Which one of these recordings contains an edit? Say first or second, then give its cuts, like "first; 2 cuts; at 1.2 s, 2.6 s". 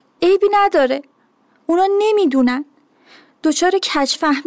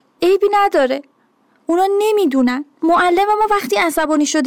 second; 1 cut; at 2.8 s